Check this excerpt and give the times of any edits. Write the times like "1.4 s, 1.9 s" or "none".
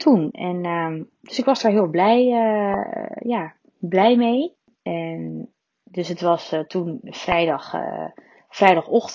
4.8 s